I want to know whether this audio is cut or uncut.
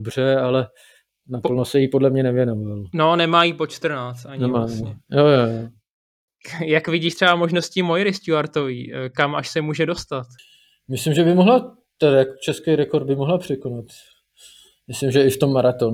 uncut